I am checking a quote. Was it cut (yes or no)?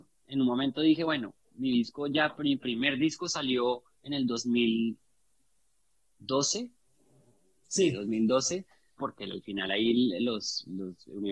yes